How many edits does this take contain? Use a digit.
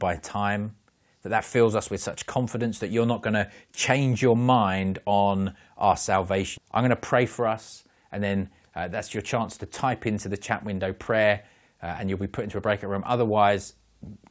1